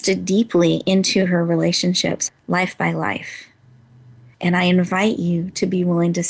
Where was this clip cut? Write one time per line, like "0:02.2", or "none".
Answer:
0:02.3
0:04.3